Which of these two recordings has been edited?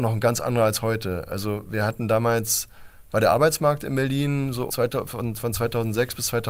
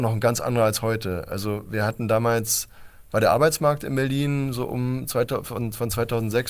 first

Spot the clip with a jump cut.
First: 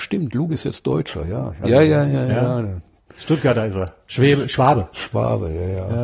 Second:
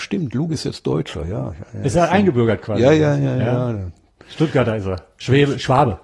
first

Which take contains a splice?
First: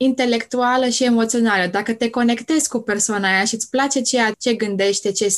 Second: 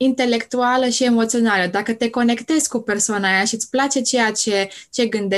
first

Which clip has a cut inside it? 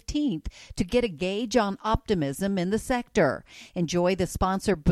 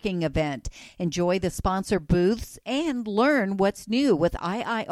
first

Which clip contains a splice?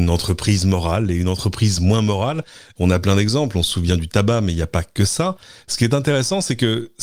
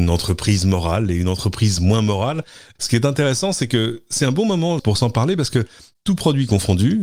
second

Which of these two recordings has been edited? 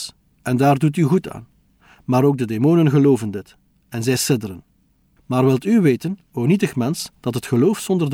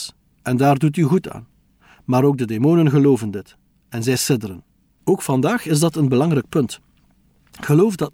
second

